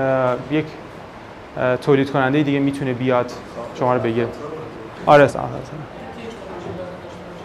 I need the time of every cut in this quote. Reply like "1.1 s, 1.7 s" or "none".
5.3 s